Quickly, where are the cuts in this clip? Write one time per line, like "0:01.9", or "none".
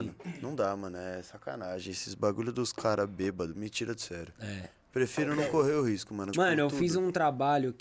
0:06.3

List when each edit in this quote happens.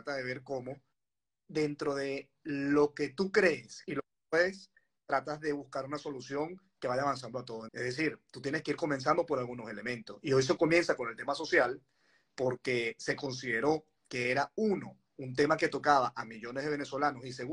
0:07.7

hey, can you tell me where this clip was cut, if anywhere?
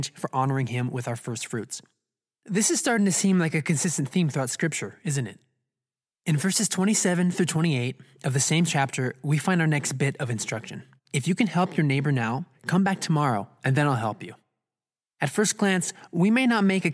0:11.0
0:12.5

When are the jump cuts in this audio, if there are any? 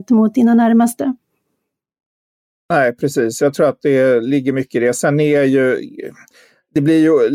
none

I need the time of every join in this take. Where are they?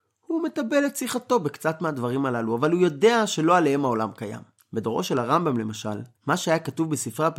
0:04.6
0:06.1

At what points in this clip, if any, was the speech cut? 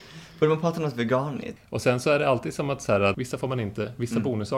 0:01.6
0:03.1

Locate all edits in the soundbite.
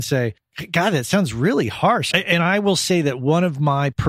0:02.1

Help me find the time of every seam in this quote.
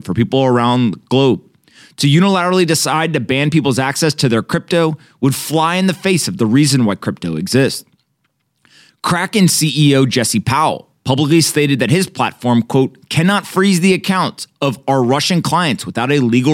none

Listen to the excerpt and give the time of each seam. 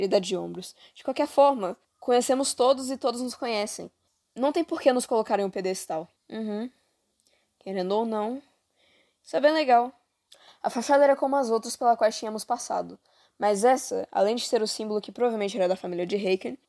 0:06.2
0:10.5

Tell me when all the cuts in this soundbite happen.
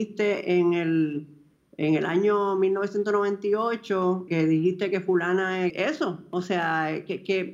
0:04.3
0:05.7

